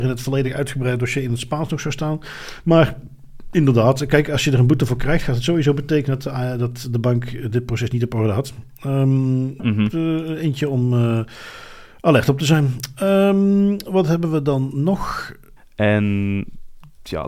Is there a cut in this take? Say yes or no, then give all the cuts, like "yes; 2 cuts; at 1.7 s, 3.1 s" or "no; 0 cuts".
yes; 2 cuts; at 9.6 s, 15.6 s